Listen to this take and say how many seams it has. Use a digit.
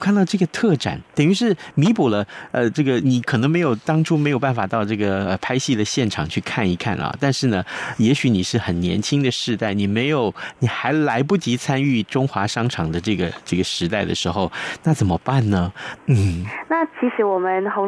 2